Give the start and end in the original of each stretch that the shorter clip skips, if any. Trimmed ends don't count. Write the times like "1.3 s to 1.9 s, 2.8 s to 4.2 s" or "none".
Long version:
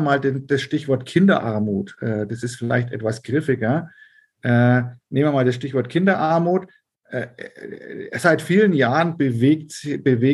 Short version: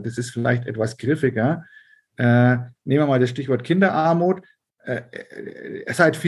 none